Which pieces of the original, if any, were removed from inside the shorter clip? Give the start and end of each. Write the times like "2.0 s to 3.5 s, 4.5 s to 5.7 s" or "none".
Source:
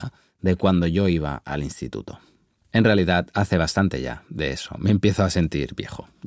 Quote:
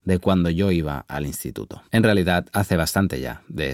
2.2 s to 2.7 s